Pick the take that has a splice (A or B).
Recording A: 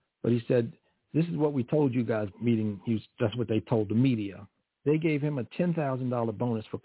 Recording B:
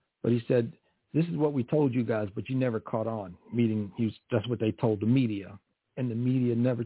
A